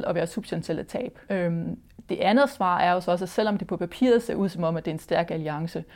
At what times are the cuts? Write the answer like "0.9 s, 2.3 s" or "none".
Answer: 1.3 s